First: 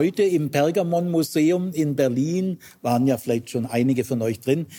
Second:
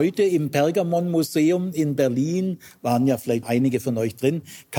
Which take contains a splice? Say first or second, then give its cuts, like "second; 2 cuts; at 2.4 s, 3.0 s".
second; 1 cut; at 3.4 s